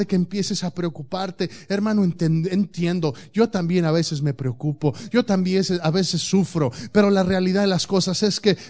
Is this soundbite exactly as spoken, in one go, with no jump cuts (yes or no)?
yes